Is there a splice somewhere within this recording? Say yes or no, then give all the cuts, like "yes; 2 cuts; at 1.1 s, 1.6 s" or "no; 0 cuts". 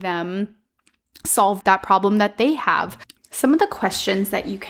yes; 2 cuts; at 1.6 s, 3.2 s